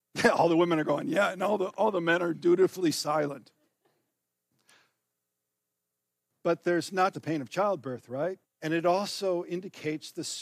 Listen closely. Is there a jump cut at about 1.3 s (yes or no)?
no